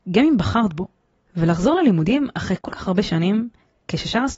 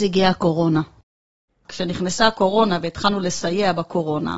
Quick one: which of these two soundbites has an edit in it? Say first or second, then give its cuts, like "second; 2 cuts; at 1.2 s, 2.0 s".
second; 1 cut; at 1.5 s